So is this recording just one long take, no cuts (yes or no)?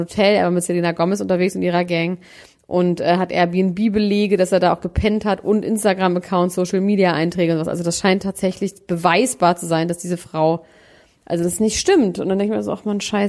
yes